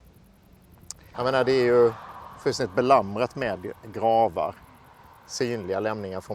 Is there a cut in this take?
yes; 1 cut; at 1.1 s

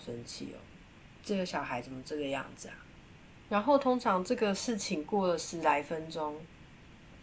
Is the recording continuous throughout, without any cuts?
no; 1 cut; at 3.4 s

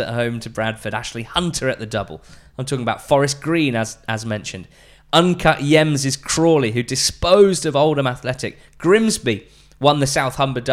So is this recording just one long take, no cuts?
yes; 0 cuts

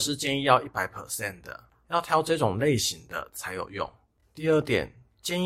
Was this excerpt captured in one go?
yes; 0 cuts

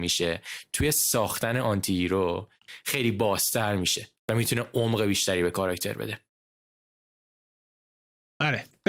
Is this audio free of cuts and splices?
yes; 0 cuts

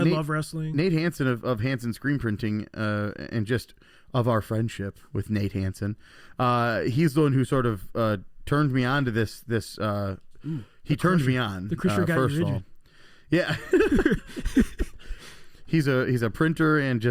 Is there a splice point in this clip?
no; 0 cuts

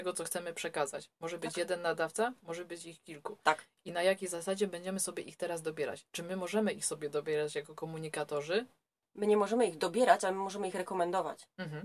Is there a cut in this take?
yes; 1 cut; at 9.0 s

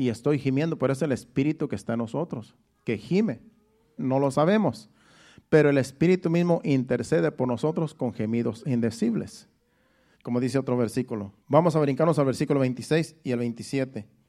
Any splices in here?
yes; 3 cuts; at 4.0 s, 10.1 s, 11.4 s

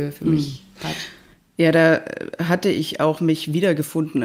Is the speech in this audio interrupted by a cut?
no; 0 cuts

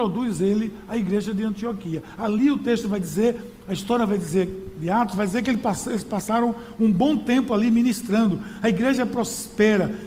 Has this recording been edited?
no; 0 cuts

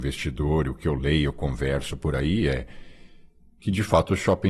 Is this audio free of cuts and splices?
yes; 0 cuts

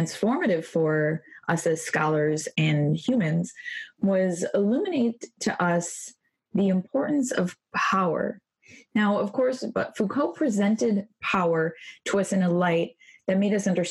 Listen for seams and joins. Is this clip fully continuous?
no; 1 cut; at 9.7 s

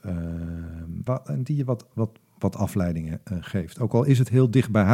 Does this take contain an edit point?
yes; 1 cut; at 1.1 s

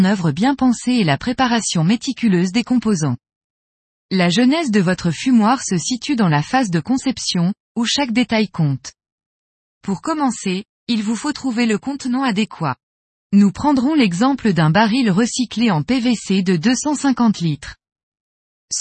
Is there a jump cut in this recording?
no; 0 cuts

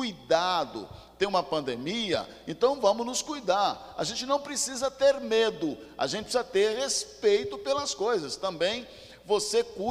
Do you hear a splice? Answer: no; 0 cuts

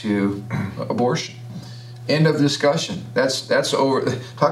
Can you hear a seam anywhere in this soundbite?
no; 0 cuts

